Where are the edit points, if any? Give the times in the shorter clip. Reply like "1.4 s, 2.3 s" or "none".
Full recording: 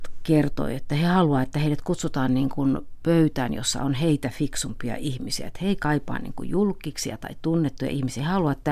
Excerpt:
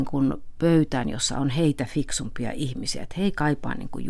none